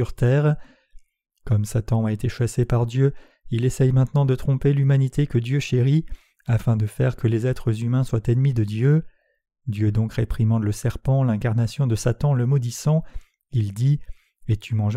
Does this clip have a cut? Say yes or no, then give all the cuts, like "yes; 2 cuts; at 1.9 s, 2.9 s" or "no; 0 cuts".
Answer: no; 0 cuts